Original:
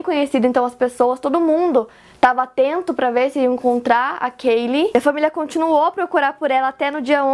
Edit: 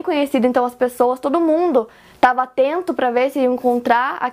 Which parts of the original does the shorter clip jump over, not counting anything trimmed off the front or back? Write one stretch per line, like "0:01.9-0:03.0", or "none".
none